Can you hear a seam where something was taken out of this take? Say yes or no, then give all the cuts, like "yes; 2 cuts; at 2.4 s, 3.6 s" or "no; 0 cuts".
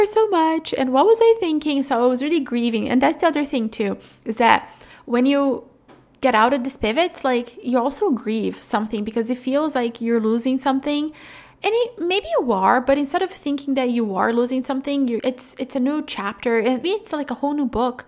yes; 2 cuts; at 15.2 s, 16.8 s